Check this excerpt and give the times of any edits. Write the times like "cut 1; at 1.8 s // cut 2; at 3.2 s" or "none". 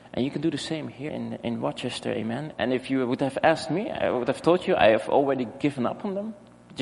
cut 1; at 1.1 s // cut 2; at 2.5 s